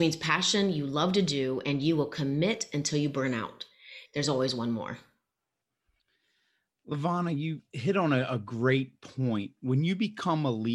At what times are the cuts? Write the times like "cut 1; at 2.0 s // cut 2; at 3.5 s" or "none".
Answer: cut 1; at 4.1 s